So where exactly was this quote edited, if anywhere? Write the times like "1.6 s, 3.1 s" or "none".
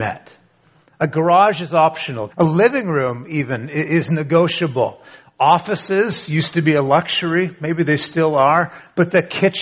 2.3 s

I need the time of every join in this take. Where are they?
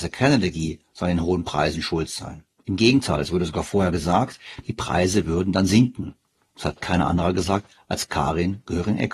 none

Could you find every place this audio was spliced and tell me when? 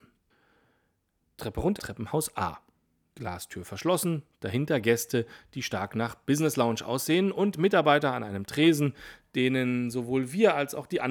1.8 s

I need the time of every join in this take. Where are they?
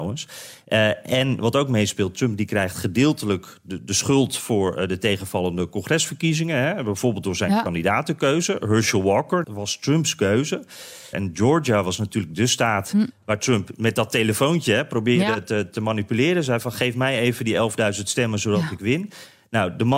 9.4 s, 11.1 s

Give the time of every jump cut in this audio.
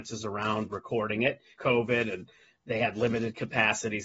1.6 s

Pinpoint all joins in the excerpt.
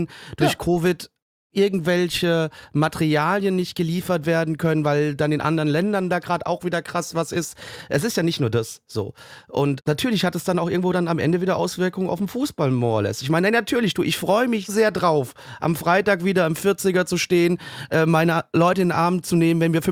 9.8 s, 14.7 s

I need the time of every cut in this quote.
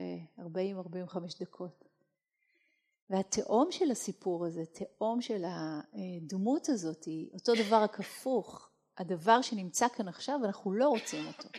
none

